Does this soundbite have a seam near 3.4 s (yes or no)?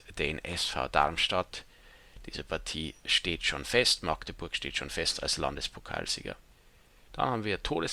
no